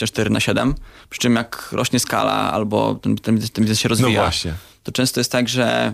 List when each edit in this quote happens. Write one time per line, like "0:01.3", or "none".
none